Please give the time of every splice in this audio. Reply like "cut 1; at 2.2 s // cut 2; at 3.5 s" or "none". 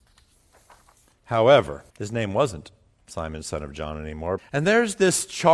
cut 1; at 1.9 s // cut 2; at 4.4 s